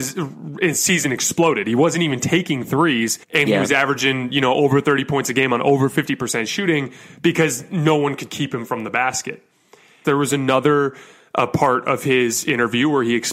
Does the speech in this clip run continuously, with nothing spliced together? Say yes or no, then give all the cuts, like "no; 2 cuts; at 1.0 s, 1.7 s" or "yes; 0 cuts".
no; 2 cuts; at 3.2 s, 10.0 s